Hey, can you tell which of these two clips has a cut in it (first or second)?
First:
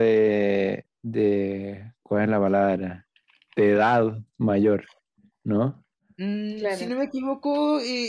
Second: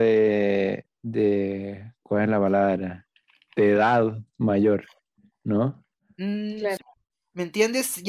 second